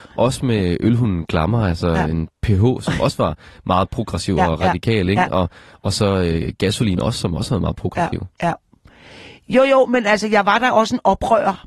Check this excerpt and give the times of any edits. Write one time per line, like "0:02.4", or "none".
none